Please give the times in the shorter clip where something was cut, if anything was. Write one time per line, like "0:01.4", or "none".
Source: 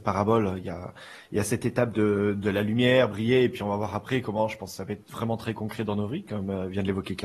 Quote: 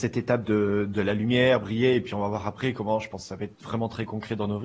none